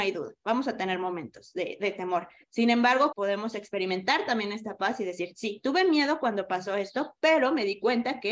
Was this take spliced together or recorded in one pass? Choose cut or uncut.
cut